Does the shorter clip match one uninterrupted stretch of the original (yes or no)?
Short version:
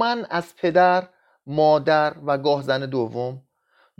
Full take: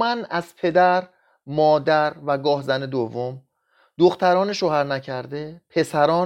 yes